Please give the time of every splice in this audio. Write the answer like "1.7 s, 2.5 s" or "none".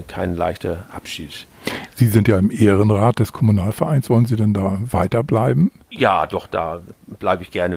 none